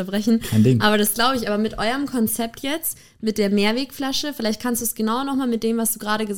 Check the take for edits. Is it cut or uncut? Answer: uncut